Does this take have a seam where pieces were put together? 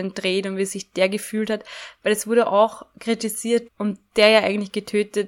yes; 1 cut; at 3.7 s

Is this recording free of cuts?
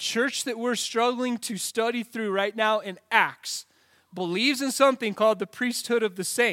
yes; 0 cuts

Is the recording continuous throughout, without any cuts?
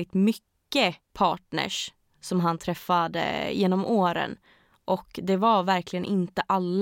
yes; 0 cuts

